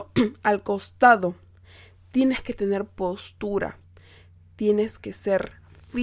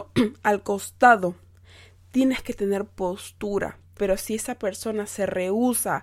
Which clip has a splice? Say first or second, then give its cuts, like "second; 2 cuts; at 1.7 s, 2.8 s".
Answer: second; 1 cut; at 4.0 s